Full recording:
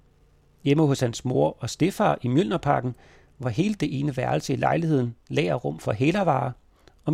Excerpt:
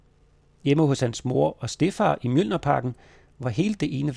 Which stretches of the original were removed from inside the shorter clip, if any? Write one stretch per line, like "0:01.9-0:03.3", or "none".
none

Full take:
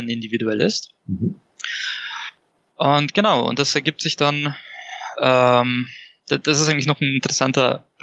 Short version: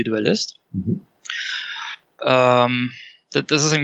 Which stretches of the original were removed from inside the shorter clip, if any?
0:02.5-0:05.1

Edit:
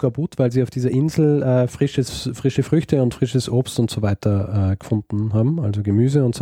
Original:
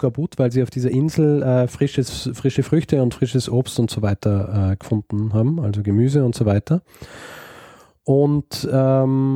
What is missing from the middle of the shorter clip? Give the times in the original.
none

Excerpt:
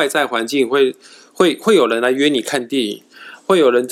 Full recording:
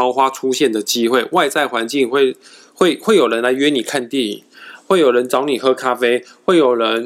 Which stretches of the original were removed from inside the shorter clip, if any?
none

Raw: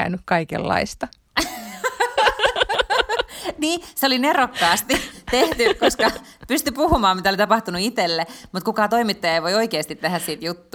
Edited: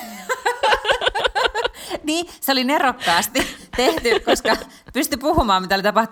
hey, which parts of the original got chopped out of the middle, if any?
none

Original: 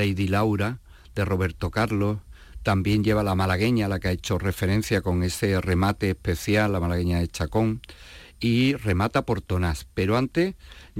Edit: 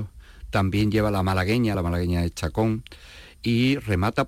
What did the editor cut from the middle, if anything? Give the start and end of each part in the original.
0:03.9-0:06.7

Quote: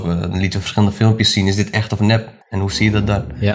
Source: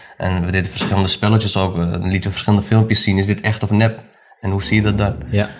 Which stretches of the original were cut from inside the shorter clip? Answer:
0:04.1-0:04.3

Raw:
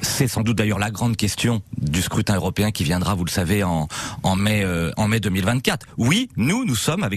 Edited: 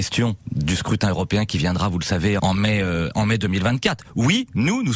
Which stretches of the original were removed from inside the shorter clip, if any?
0:03.7-0:04.2

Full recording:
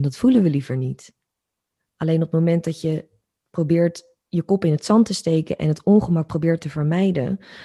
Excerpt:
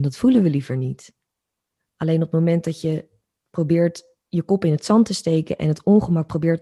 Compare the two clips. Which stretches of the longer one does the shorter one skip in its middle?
none

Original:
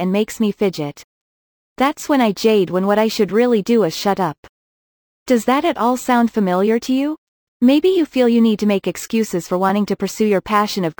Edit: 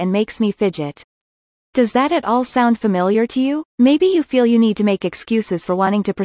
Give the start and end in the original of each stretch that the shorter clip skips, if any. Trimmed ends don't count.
0:01.6-0:05.1
0:07.2-0:07.5

